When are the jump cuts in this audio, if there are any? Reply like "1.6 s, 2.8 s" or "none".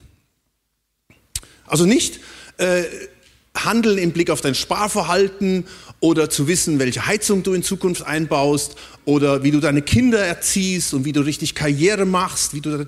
1.7 s